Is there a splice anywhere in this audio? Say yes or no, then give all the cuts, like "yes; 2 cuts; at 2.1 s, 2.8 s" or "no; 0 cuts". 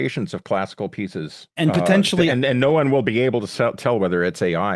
yes; 1 cut; at 1.5 s